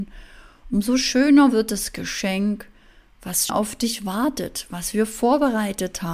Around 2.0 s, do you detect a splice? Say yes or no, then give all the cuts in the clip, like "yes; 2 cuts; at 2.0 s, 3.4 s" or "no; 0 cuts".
no; 1 cut; at 3.5 s